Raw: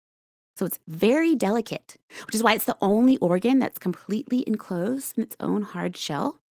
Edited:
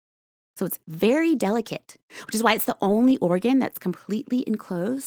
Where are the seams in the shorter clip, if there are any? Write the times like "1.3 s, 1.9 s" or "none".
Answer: none